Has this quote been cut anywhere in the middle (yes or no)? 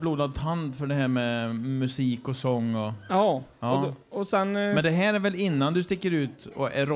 no